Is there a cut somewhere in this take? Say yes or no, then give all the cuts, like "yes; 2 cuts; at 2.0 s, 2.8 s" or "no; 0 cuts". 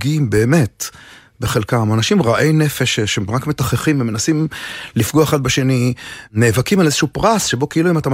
no; 0 cuts